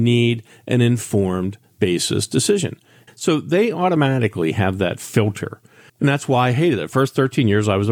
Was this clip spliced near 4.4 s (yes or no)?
no